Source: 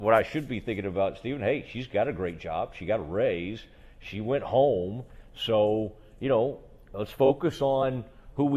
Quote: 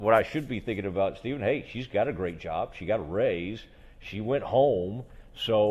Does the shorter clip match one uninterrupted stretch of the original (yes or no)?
yes